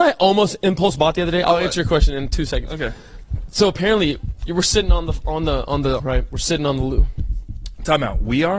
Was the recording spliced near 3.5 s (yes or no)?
no